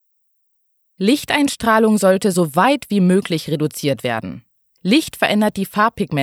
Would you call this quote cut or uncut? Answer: uncut